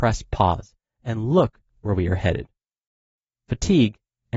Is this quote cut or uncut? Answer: uncut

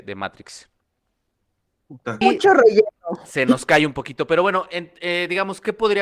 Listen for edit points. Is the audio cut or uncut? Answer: cut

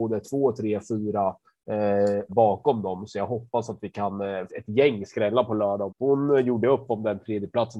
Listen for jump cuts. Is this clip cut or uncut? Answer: cut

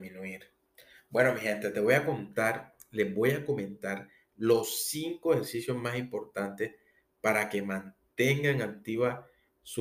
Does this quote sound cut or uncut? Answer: uncut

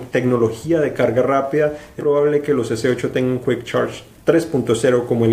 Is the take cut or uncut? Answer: cut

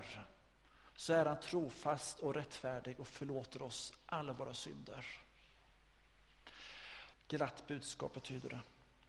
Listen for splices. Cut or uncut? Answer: cut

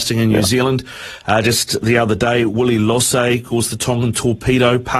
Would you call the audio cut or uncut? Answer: uncut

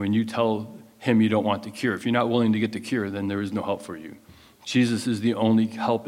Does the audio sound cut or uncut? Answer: uncut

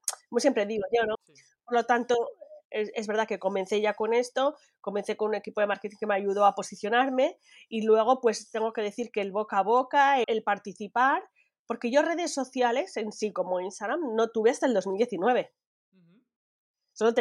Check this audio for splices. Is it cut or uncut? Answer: cut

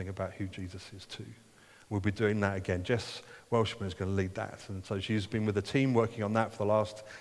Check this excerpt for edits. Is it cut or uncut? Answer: uncut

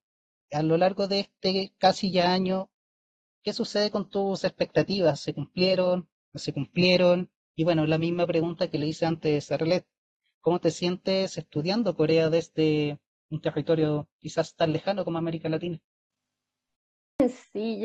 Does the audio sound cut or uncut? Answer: uncut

